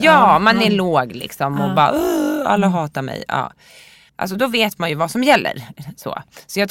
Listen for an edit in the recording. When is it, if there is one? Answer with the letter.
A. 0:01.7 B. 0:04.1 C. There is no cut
B